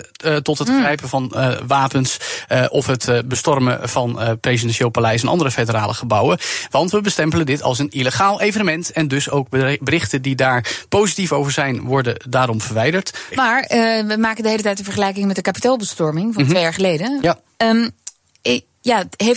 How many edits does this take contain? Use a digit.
2